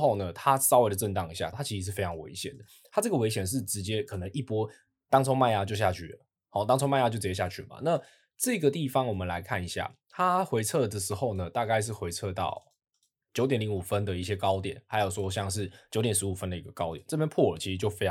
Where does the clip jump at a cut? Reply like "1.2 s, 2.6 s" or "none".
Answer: 1.5 s

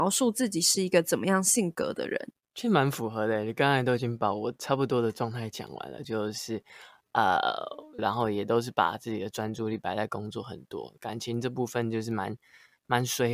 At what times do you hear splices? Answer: 6.0 s, 8.0 s

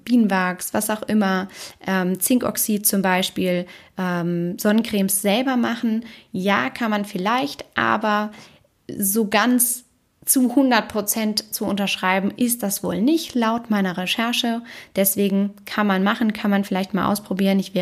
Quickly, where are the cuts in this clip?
none

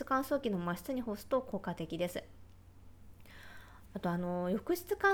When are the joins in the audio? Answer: none

